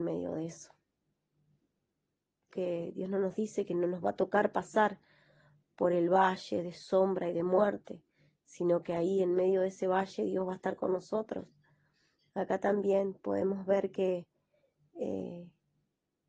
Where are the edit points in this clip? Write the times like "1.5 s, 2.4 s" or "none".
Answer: 2.5 s